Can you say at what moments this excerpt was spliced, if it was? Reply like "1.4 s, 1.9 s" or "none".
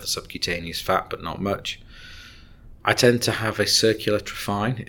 2.8 s